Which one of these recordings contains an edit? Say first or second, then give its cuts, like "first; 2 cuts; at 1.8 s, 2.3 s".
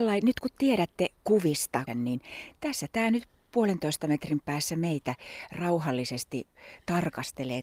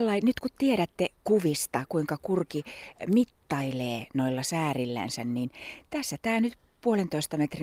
first; 1 cut; at 1.9 s